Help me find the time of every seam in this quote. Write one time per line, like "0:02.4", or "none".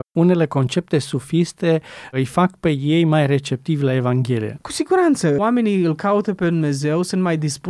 0:04.6